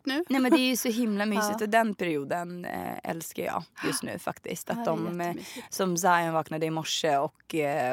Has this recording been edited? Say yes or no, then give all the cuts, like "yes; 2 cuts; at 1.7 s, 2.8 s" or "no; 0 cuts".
no; 0 cuts